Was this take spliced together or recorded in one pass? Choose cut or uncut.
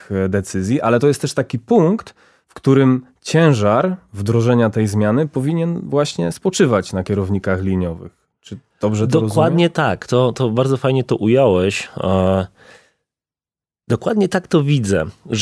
uncut